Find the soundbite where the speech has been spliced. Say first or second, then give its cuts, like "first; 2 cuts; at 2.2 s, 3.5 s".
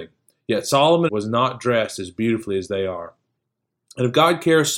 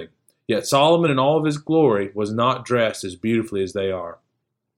first; 1 cut; at 1.1 s